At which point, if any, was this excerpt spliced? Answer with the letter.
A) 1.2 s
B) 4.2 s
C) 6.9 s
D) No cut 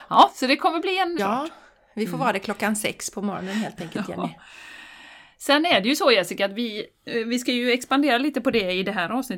A